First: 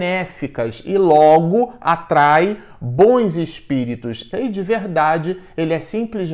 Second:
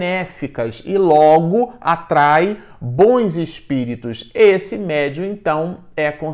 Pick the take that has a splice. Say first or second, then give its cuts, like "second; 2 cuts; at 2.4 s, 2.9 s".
first; 1 cut; at 4.3 s